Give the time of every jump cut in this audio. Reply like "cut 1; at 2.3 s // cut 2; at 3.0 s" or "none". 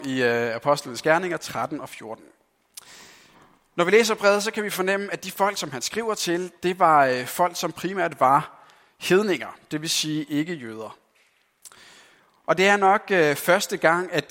none